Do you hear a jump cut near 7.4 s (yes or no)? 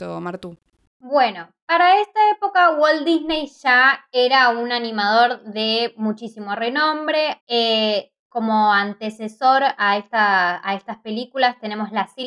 yes